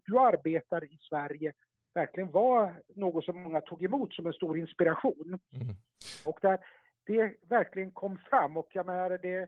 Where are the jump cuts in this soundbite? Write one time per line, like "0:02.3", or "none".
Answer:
0:06.3